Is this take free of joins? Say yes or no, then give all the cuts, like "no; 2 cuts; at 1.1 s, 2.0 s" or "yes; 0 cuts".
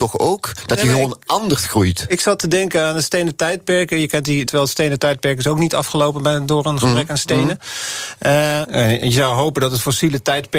no; 2 cuts; at 4.5 s, 8.6 s